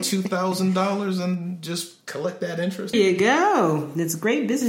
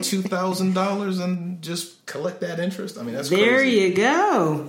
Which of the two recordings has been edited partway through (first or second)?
first